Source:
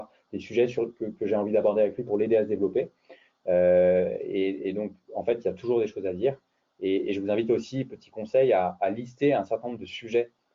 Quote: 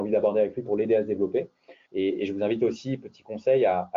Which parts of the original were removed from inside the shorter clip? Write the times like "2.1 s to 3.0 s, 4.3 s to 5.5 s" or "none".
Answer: 3.3 s to 6.7 s